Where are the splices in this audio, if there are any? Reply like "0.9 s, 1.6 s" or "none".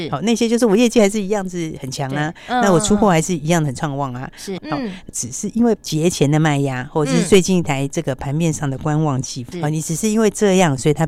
4.6 s, 9.5 s